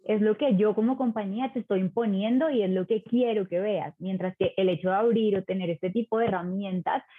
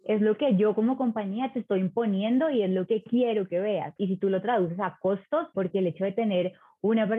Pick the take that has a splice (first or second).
second